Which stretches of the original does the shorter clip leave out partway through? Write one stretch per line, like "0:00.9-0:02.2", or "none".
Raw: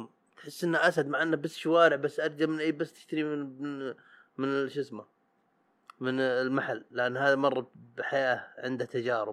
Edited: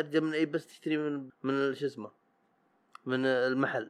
0:03.6-0:04.2